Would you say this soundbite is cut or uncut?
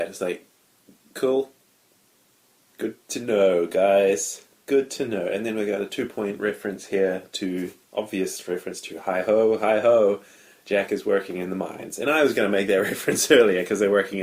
uncut